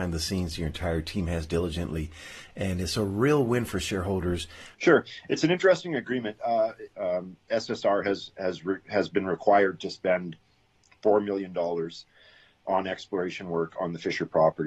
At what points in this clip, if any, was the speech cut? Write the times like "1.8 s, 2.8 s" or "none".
4.7 s, 6.9 s